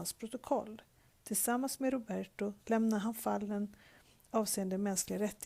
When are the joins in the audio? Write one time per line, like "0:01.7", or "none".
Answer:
0:02.6